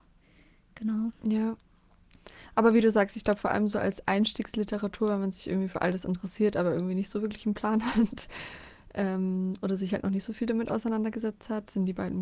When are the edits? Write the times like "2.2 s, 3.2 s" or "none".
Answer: none